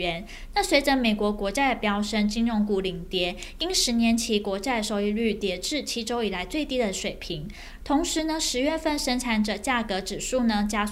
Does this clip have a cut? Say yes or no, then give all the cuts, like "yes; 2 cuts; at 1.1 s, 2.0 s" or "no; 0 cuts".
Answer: yes; 1 cut; at 7.8 s